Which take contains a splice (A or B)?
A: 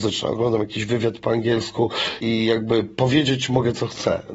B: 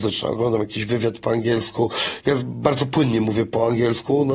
A